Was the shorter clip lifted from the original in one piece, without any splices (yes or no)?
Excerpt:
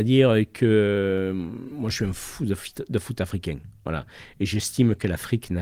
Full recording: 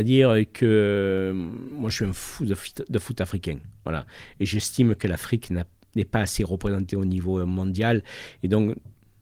yes